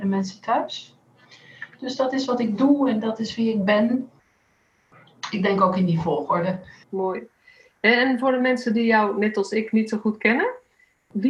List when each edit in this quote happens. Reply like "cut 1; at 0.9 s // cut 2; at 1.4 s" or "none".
cut 1; at 6.8 s